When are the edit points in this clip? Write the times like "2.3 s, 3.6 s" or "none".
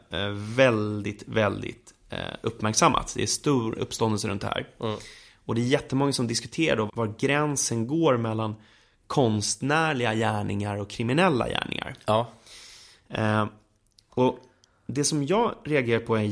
3.8 s, 6.9 s